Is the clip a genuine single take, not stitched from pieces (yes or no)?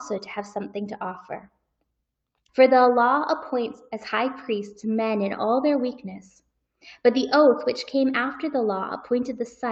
no